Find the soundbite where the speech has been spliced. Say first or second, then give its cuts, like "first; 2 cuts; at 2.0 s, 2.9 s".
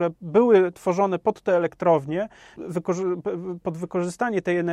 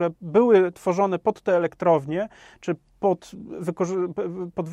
first; 1 cut; at 2.6 s